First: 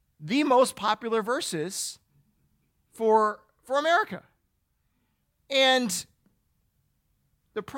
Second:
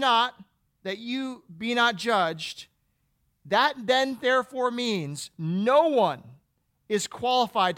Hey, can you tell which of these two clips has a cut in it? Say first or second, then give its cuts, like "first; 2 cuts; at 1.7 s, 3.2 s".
first; 1 cut; at 5.4 s